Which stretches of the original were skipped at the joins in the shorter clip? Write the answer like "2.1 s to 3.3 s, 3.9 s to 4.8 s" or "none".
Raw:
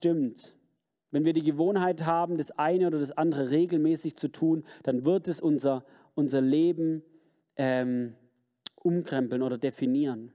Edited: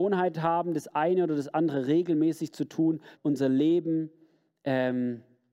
4.8 s to 6.1 s